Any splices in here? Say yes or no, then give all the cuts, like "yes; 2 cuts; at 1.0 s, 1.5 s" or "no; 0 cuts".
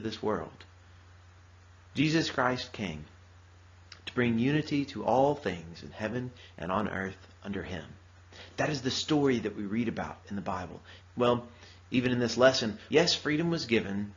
yes; 2 cuts; at 11.0 s, 12.9 s